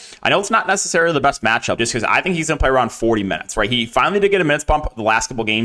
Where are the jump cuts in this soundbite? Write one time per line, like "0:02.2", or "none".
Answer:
0:01.8